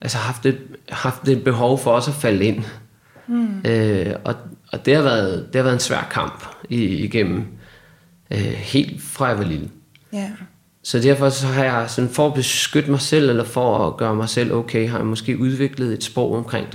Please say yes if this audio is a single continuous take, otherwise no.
yes